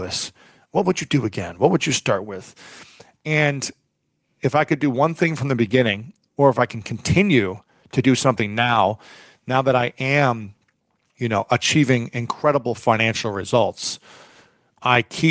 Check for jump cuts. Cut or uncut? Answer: uncut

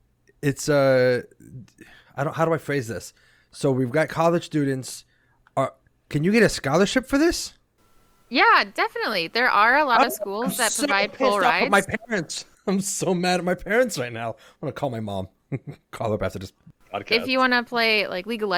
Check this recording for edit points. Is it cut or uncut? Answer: uncut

